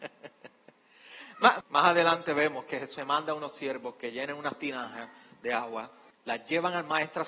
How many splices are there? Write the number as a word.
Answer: three